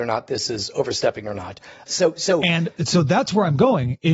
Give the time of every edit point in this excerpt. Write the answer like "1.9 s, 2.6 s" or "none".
1.9 s